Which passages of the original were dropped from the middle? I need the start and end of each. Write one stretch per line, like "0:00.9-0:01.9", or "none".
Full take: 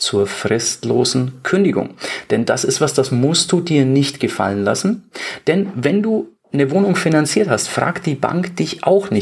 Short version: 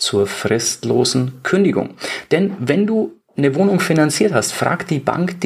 0:02.3-0:05.4